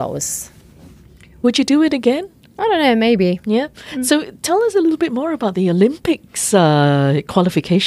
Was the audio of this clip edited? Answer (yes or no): no